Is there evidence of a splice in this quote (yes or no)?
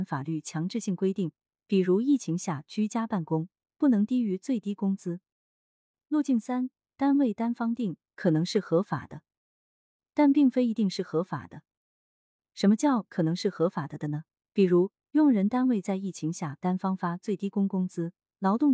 no